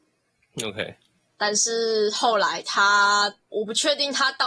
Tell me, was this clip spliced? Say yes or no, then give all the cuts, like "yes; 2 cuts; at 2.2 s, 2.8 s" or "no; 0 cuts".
yes; 1 cut; at 3.5 s